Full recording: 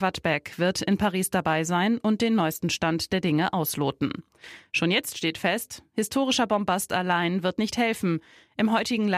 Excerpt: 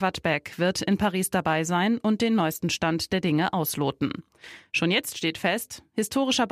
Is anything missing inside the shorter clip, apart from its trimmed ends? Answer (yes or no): no